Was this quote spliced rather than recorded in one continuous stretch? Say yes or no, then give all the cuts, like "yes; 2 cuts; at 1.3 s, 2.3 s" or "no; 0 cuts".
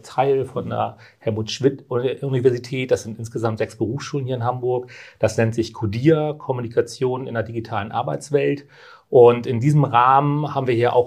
no; 0 cuts